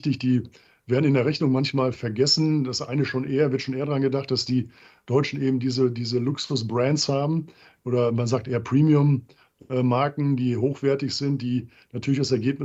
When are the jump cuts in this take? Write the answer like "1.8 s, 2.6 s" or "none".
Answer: none